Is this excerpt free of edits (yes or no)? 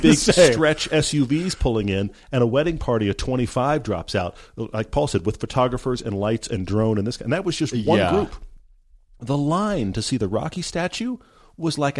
yes